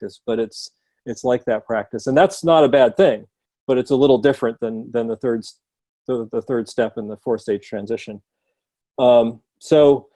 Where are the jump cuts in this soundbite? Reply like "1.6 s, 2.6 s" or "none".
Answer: none